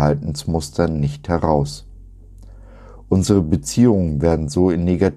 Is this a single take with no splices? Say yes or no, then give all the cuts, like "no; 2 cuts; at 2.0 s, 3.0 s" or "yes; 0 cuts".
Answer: yes; 0 cuts